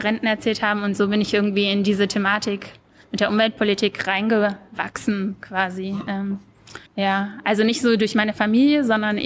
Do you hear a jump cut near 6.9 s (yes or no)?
yes